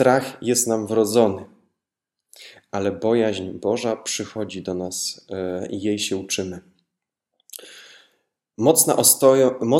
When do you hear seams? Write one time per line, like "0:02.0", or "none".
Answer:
none